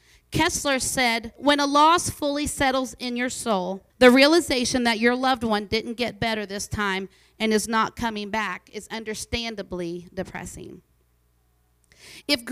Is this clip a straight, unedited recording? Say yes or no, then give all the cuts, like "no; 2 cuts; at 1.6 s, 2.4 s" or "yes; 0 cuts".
no; 2 cuts; at 1.4 s, 3.9 s